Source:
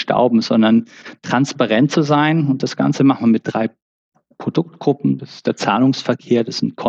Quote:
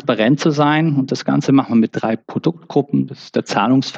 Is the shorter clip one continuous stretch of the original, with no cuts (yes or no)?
no